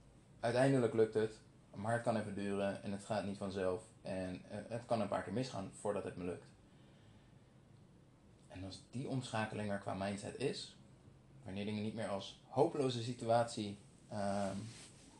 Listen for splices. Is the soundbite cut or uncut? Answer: uncut